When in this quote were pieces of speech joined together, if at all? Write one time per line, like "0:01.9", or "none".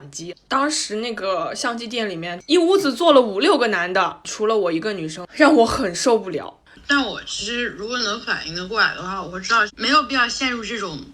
0:05.3
0:06.7